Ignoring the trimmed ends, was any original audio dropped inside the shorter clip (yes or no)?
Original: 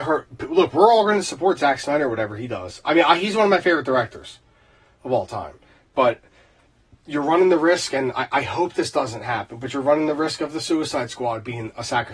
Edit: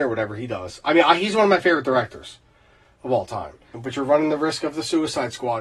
yes